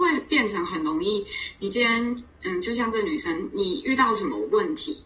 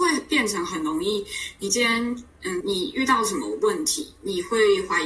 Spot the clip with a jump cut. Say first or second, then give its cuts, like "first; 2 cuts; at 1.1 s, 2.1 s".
second; 1 cut; at 2.6 s